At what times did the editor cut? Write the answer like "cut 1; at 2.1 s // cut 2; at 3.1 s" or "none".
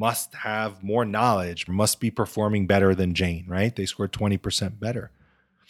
cut 1; at 1.7 s

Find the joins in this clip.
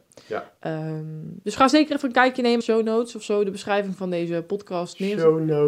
cut 1; at 2.6 s

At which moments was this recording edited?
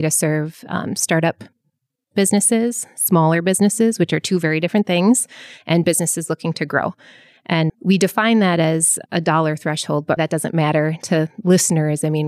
cut 1; at 7.7 s // cut 2; at 9.1 s // cut 3; at 10.2 s

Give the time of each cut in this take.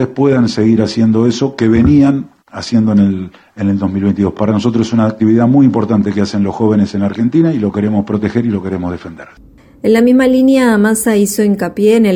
none

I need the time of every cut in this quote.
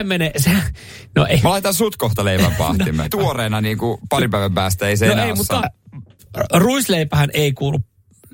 cut 1; at 3.0 s // cut 2; at 5.6 s

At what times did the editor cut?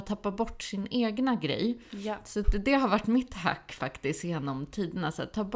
none

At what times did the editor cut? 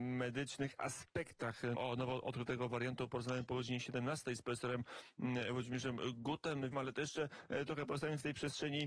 cut 1; at 1.7 s // cut 2; at 6.7 s

